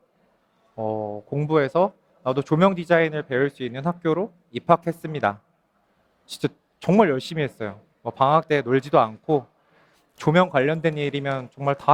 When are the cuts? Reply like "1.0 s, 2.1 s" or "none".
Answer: none